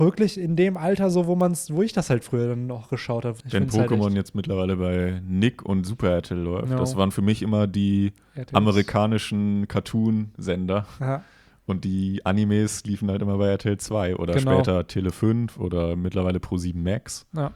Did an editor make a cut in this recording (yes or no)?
yes